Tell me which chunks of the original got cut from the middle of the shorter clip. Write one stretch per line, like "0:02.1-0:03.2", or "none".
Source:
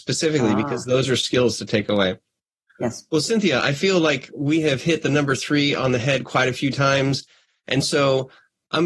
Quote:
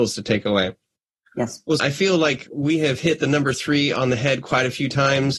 0:03.2-0:03.6